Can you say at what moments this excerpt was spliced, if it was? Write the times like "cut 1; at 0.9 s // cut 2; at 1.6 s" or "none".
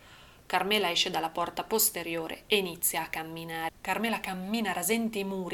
cut 1; at 3.7 s

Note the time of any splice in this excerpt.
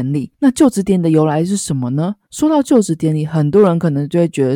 cut 1; at 2.2 s

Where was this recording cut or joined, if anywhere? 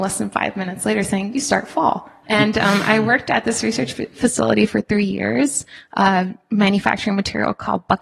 cut 1; at 2.2 s

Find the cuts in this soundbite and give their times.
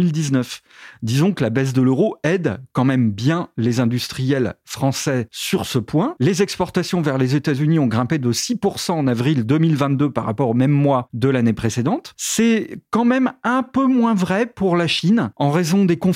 cut 1; at 6.2 s

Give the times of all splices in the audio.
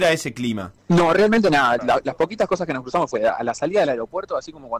cut 1; at 1.8 s

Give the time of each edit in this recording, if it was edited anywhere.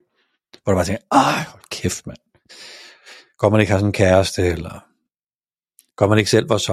none

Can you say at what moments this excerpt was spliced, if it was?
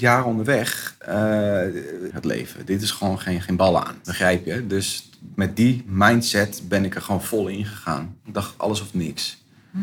cut 1; at 2.1 s // cut 2; at 4.0 s

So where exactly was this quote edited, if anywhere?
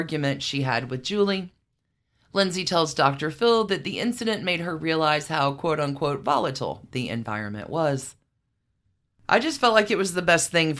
none

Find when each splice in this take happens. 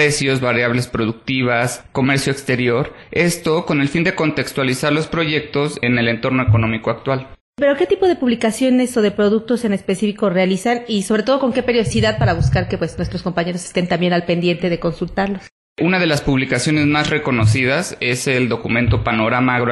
none

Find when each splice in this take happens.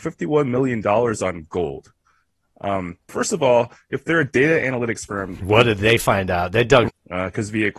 cut 1; at 3.1 s // cut 2; at 6.9 s

